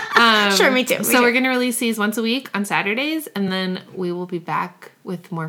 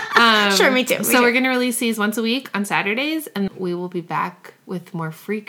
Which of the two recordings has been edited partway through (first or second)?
second